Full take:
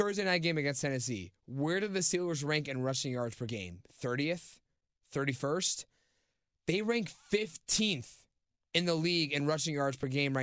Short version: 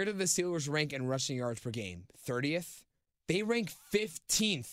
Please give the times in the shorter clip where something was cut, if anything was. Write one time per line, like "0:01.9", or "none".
0:03.2